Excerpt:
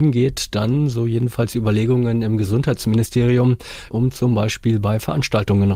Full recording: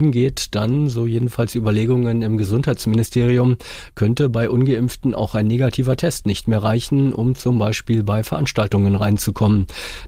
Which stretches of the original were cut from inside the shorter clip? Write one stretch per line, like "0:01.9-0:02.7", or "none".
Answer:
0:03.9-0:07.1